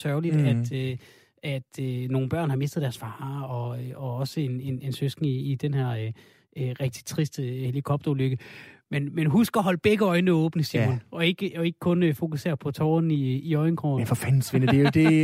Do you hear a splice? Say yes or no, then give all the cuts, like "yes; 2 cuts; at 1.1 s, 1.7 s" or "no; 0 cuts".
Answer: no; 0 cuts